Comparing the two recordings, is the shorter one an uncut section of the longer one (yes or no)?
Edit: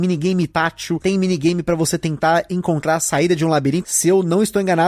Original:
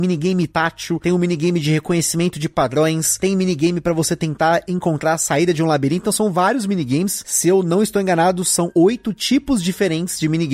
no